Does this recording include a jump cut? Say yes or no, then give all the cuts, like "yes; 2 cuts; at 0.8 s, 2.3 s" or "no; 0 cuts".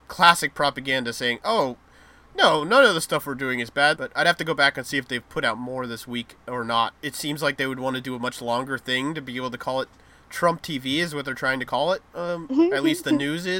yes; 2 cuts; at 4.0 s, 6.9 s